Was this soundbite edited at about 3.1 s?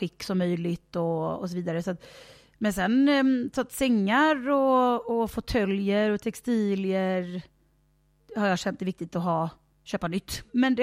no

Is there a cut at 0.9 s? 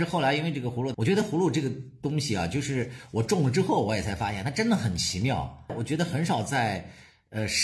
yes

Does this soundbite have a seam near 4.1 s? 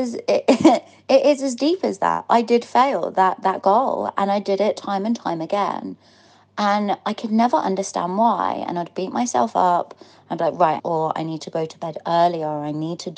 no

